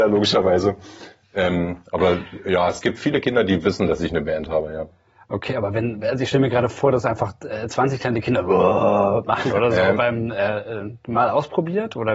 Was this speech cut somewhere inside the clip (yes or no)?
no